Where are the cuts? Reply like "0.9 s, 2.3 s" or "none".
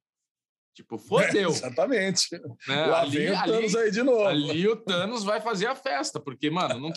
none